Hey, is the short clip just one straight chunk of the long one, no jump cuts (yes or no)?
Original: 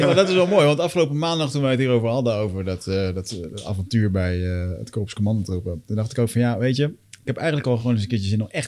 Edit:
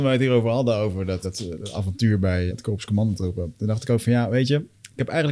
no